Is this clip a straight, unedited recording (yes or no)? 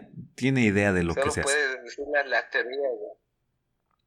yes